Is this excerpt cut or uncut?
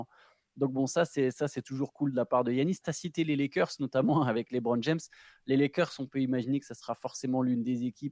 cut